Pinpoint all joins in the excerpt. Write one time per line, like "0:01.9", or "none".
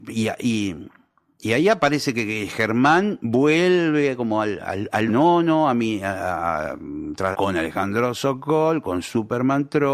0:05.1
0:07.3

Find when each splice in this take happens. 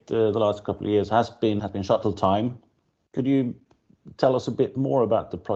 0:01.6

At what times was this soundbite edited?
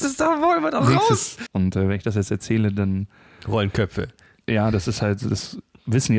0:01.5

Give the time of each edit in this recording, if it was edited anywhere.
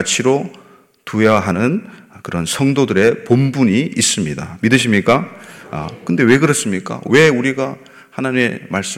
none

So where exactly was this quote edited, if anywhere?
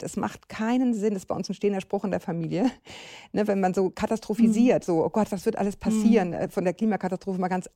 none

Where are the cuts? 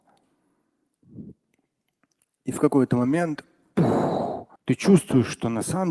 0:04.6

